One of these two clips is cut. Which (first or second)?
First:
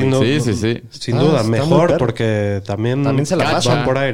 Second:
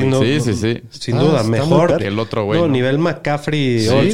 second